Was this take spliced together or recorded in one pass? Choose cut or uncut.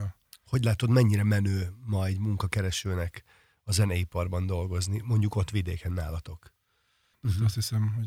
cut